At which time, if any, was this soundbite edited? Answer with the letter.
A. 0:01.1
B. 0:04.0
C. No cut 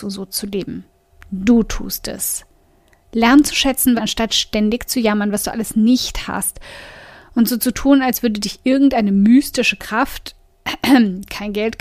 B